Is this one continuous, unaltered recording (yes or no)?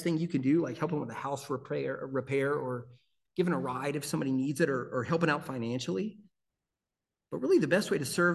yes